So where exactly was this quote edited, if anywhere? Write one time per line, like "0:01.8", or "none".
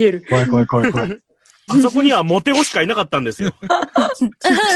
0:01.7